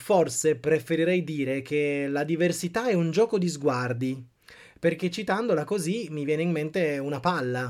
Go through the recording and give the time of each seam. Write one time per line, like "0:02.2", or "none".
none